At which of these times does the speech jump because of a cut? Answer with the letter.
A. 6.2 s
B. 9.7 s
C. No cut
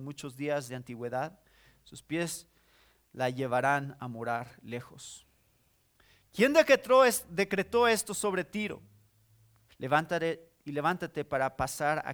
B